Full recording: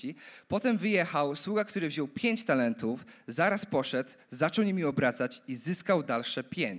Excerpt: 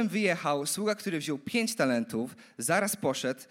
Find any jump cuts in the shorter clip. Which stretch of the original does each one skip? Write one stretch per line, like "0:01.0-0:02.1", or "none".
none